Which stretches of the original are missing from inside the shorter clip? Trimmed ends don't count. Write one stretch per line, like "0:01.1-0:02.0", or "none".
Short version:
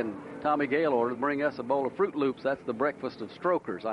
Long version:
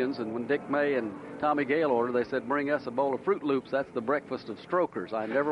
0:02.1-0:02.4